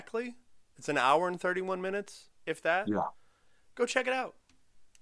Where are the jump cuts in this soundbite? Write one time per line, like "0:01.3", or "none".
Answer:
0:02.3

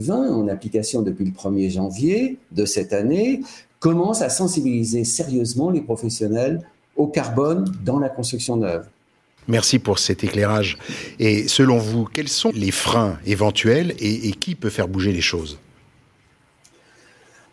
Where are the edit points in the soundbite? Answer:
0:09.4
0:12.5

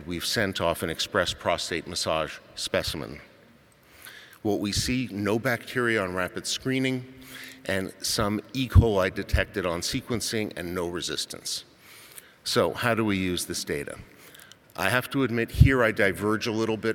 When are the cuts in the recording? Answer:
none

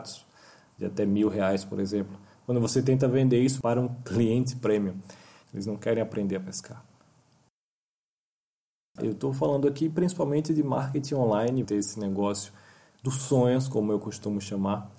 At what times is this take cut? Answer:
0:05.4
0:09.0
0:11.6

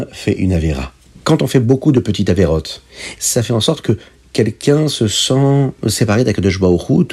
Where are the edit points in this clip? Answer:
0:01.2
0:03.2

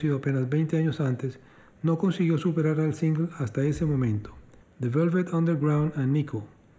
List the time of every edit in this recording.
0:04.6

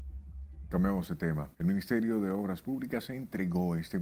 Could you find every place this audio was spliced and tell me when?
0:01.5

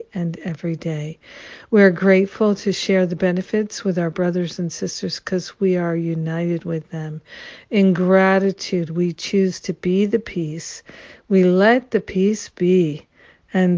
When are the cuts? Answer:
none

